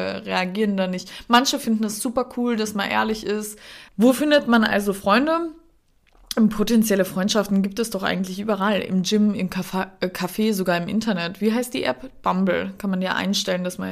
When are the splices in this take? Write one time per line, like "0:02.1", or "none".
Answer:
0:03.9